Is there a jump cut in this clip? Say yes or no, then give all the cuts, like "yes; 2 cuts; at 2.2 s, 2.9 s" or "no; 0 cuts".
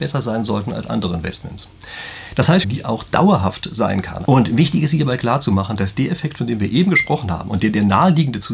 yes; 2 cuts; at 2.6 s, 4.2 s